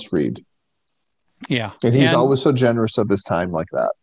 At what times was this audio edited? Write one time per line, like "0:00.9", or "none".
none